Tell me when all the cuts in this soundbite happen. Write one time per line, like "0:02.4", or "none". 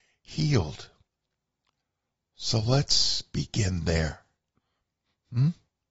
0:02.2